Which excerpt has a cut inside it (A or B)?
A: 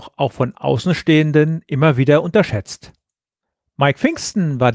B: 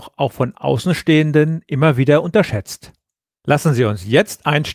B